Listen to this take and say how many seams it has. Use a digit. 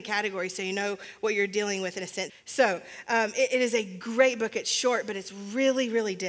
1